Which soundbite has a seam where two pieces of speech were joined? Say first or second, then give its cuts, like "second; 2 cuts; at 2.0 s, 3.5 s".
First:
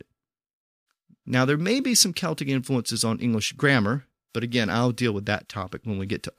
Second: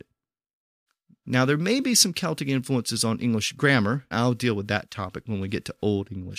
second; 1 cut; at 4.1 s